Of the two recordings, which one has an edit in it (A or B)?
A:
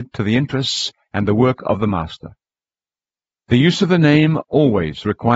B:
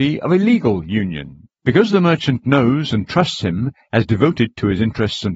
B